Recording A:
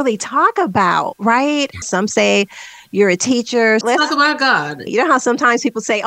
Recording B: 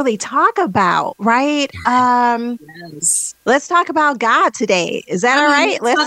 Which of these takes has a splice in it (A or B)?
A